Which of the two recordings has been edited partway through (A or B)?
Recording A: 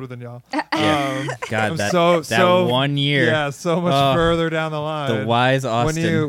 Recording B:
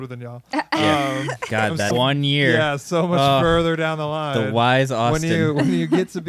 B